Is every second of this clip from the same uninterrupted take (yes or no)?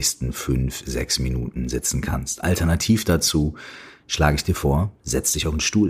yes